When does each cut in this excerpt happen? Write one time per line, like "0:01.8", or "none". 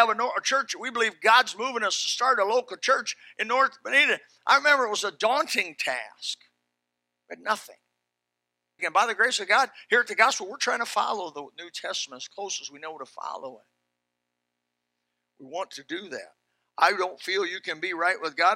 0:08.8